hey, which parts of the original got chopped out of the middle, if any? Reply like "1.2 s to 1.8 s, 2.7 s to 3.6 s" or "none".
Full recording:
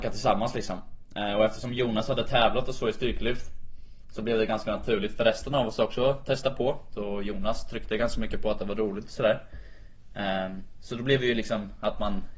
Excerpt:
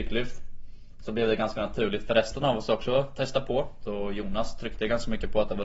none